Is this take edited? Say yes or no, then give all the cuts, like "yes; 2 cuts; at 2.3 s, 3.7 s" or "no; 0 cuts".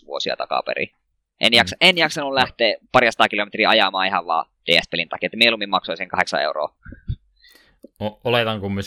yes; 1 cut; at 1.2 s